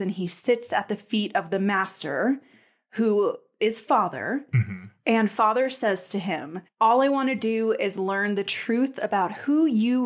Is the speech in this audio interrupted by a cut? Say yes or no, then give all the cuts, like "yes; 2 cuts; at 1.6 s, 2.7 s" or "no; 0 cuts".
no; 0 cuts